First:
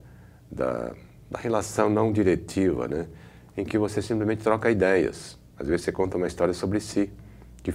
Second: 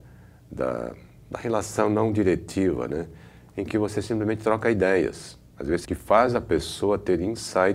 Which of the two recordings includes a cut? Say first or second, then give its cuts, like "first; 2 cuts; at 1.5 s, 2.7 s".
second; 1 cut; at 5.8 s